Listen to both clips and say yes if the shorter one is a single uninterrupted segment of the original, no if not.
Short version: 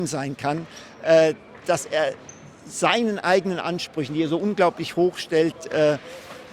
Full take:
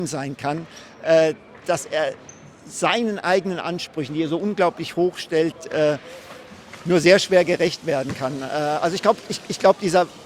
yes